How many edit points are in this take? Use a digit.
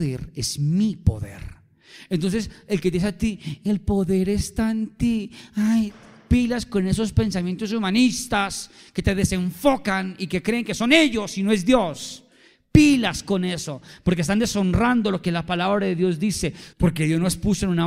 1